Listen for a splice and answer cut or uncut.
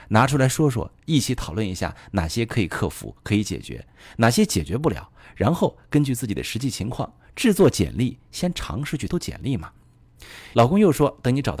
cut